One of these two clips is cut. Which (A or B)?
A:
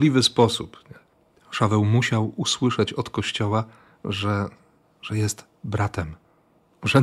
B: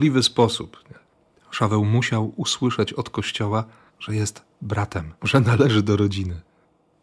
B